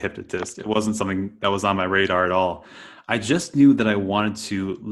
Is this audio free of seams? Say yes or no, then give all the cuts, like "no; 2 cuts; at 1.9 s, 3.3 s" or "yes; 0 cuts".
yes; 0 cuts